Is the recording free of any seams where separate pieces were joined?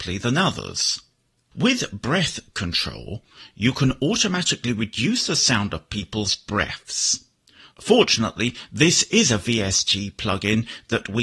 yes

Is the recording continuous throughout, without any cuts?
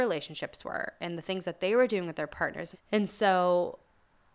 no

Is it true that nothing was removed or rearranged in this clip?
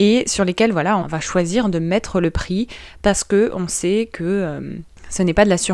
no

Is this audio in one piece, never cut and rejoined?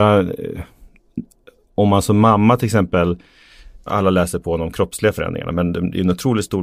no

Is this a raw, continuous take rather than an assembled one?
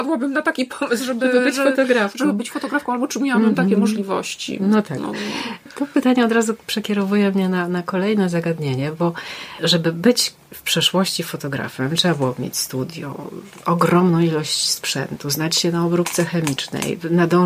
yes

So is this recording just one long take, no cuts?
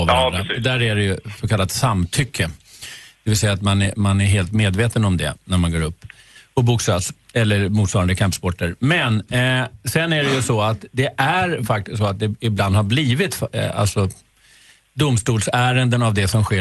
yes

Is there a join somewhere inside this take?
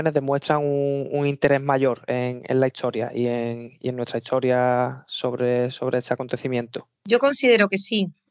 no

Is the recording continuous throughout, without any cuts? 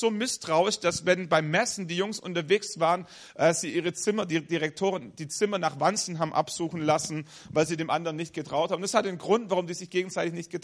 yes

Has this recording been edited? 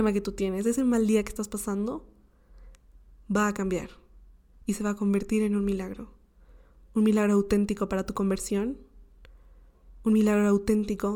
no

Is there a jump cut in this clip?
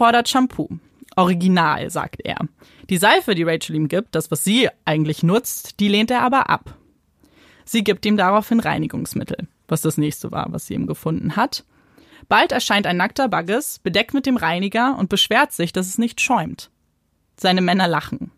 no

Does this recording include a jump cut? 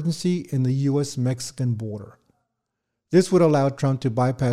no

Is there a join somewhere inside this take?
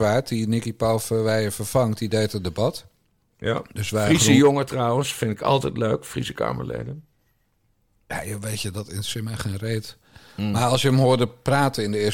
no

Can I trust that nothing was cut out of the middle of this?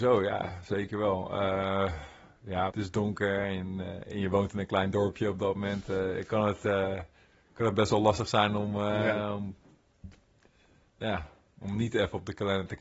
no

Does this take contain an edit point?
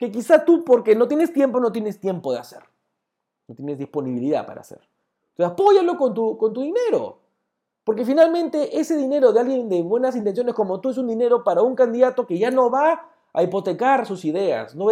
no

